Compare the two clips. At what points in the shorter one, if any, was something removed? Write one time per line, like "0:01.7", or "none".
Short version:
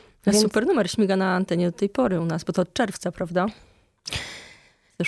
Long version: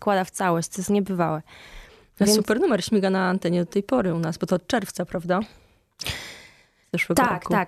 none